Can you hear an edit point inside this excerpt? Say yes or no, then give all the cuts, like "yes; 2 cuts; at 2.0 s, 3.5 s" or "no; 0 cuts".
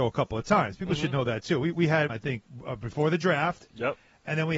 yes; 1 cut; at 2.1 s